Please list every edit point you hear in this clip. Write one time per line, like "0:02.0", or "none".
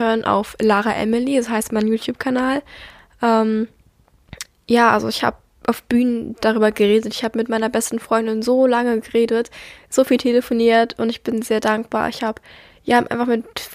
none